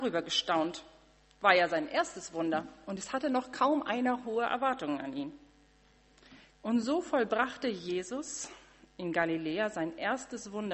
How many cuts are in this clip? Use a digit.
1